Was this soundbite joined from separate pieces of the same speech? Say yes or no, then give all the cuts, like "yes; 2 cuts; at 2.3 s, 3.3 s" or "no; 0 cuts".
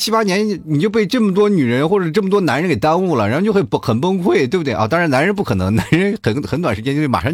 no; 0 cuts